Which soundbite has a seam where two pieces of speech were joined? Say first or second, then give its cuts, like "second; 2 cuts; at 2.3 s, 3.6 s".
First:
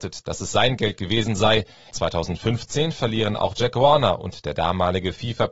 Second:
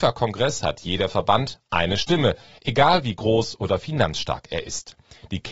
first; 1 cut; at 1.9 s